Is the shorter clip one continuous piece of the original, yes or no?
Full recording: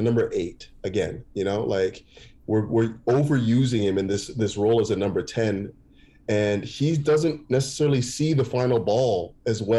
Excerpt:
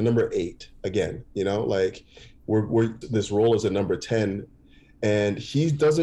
no